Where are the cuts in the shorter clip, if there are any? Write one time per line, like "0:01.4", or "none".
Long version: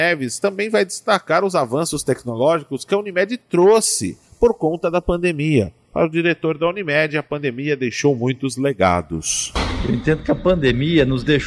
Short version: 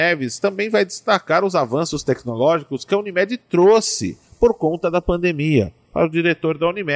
none

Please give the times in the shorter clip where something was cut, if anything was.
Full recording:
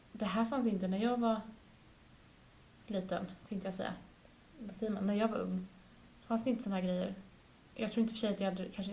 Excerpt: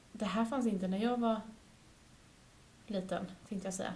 none

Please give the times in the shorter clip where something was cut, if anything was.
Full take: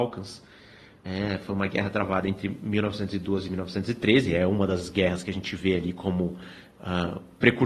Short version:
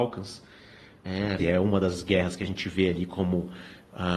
0:01.4

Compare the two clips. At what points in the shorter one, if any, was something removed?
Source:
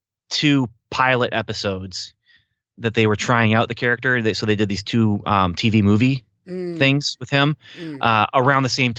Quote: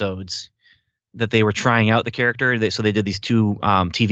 none

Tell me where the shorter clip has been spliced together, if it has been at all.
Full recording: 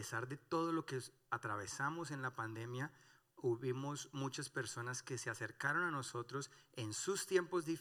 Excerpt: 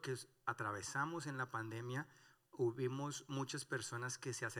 none

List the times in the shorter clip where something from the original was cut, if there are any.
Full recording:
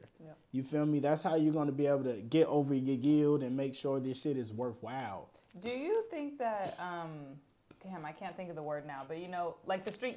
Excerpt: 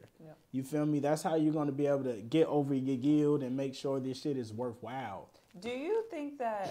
none

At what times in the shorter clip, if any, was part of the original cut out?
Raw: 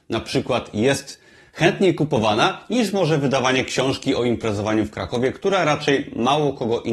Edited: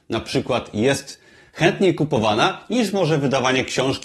none

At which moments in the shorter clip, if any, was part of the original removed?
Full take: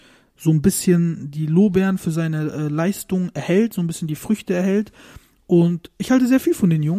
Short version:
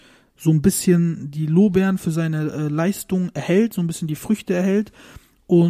none

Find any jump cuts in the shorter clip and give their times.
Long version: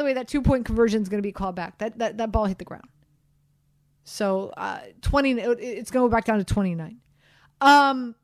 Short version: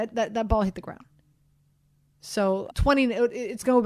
0:02.7

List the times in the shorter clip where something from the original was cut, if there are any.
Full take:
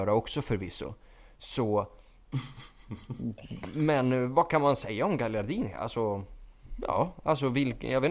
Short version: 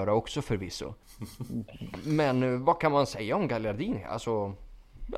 0:01.0

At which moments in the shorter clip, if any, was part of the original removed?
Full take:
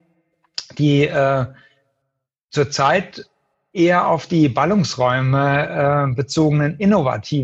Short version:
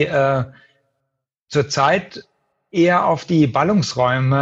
none

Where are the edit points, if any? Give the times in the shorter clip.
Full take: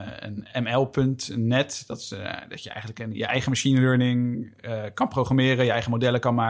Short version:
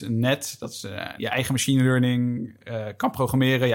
0:01.2

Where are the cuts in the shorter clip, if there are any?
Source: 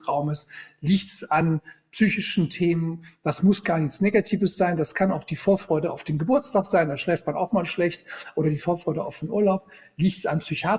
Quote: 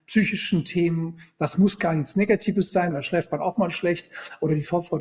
0:02.9

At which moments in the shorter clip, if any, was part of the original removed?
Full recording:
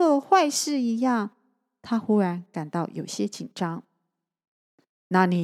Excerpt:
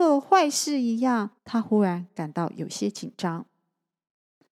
0:01.4

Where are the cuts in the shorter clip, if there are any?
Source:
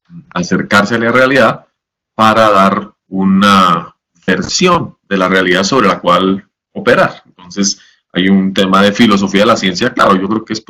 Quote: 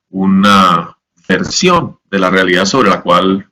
none

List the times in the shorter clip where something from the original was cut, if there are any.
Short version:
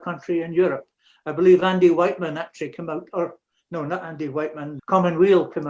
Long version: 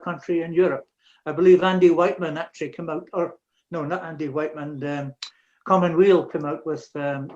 0:04.8

